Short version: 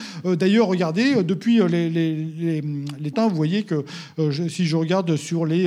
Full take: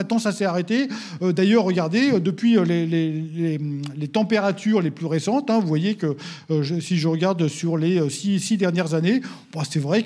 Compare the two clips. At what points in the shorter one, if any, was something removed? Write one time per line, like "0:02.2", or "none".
0:03.1